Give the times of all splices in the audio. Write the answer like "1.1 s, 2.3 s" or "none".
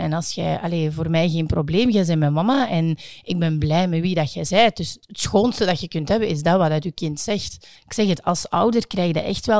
5.0 s, 7.8 s